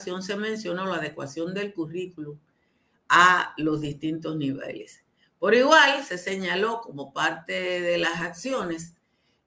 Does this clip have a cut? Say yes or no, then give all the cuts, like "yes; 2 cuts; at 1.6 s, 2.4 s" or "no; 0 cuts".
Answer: no; 0 cuts